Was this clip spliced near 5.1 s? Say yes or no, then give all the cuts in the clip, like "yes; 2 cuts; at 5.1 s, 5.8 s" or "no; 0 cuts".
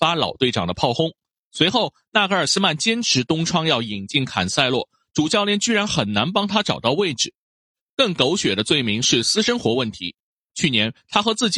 yes; 1 cut; at 5.1 s